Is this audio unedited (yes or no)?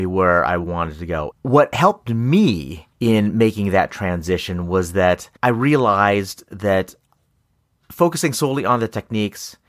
no